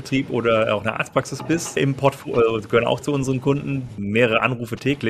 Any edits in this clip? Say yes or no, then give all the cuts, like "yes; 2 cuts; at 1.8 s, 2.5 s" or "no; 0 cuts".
yes; 2 cuts; at 1.8 s, 4.0 s